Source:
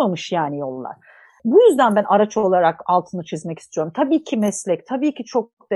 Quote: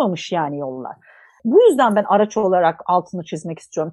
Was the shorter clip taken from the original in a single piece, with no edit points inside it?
yes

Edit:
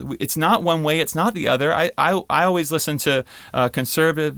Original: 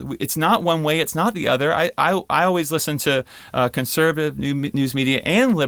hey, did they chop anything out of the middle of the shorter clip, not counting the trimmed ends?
no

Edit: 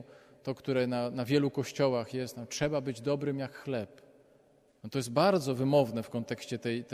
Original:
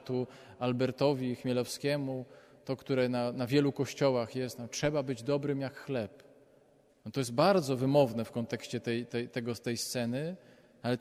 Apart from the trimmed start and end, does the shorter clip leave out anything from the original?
no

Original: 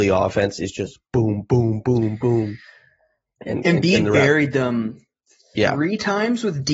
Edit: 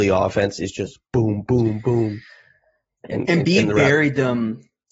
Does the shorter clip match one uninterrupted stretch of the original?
no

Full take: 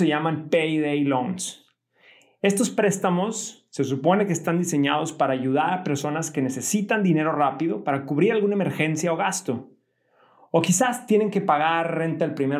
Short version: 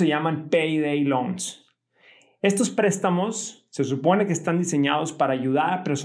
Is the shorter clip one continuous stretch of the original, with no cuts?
yes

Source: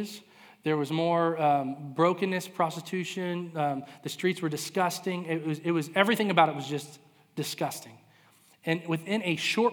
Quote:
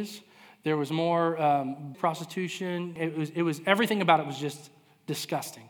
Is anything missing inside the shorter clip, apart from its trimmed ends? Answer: yes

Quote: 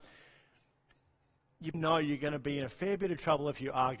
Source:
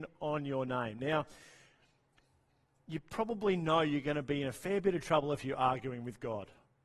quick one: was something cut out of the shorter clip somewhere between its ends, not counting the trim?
yes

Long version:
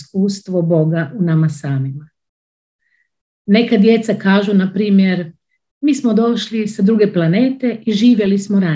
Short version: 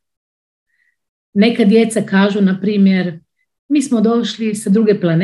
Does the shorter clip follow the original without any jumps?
yes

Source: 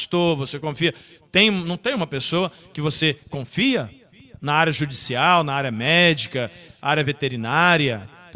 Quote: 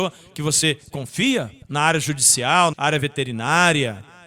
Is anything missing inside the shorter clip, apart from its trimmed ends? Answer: yes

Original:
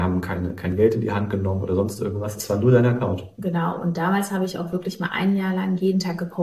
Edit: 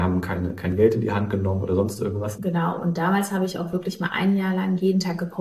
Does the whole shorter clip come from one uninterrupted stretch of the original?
no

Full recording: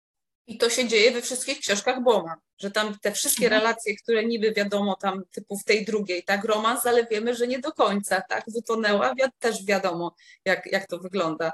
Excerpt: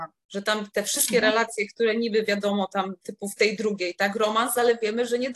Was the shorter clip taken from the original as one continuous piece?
yes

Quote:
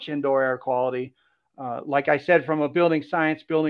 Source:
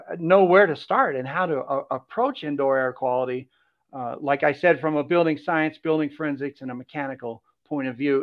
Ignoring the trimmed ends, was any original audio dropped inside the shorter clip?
no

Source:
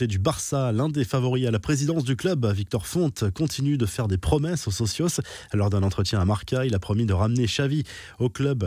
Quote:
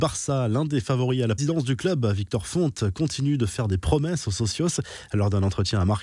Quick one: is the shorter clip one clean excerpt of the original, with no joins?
no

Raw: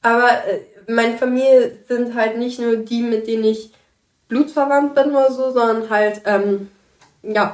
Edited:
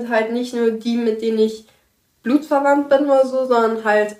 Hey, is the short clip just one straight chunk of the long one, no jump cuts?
yes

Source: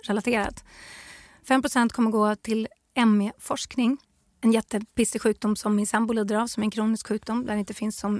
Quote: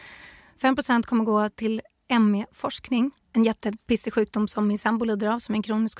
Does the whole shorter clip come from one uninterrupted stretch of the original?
no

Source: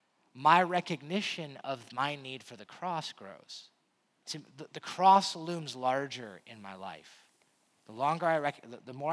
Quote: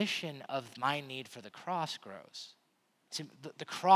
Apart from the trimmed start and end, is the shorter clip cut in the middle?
no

